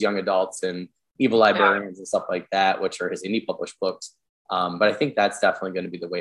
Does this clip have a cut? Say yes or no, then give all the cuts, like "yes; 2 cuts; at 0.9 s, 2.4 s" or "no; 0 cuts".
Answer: no; 0 cuts